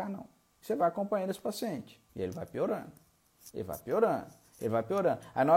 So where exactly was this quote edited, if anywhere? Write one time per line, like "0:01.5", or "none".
0:02.1